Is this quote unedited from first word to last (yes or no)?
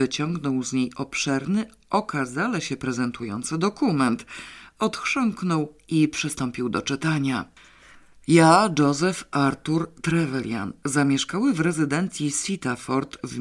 yes